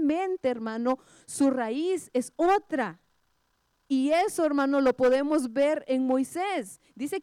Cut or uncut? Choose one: uncut